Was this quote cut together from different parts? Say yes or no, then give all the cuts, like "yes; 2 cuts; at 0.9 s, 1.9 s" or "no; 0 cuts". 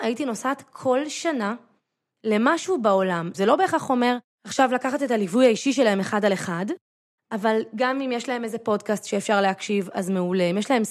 yes; 1 cut; at 3.3 s